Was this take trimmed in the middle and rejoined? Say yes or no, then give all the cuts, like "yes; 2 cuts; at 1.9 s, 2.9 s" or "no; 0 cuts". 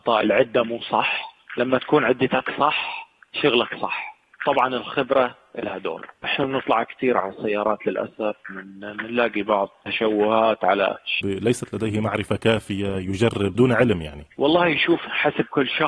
yes; 1 cut; at 11.2 s